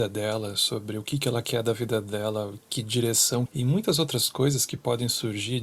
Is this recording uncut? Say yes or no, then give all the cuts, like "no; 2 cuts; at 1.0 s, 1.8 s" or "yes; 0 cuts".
no; 1 cut; at 3.5 s